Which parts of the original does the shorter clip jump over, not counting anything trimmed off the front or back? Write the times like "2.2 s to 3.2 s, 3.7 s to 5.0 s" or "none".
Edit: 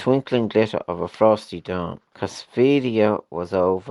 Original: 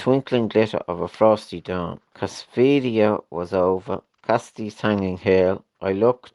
none